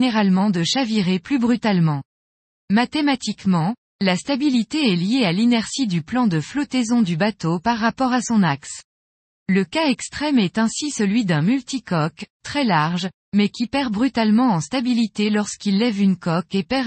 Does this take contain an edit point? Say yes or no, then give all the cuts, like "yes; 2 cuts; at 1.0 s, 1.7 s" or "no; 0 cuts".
no; 0 cuts